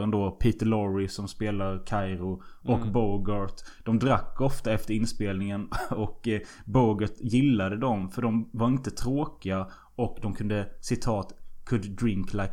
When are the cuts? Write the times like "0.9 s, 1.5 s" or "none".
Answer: none